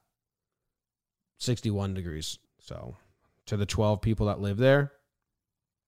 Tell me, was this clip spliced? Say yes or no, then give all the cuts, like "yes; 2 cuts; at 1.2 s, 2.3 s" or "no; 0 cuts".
yes; 1 cut; at 2.4 s